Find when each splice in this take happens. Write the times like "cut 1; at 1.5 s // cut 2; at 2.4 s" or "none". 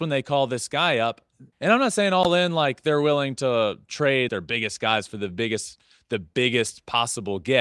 cut 1; at 1.5 s // cut 2; at 4.3 s